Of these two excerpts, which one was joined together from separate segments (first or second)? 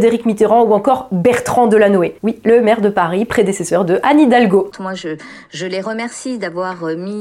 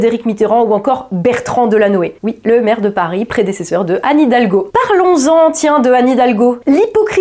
first